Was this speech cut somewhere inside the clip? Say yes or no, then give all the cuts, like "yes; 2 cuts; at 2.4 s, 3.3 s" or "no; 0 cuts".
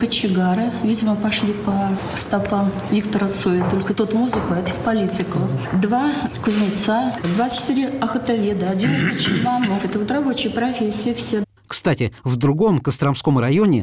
no; 0 cuts